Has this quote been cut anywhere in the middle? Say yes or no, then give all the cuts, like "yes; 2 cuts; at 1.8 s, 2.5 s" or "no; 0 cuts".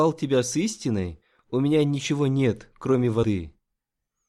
no; 0 cuts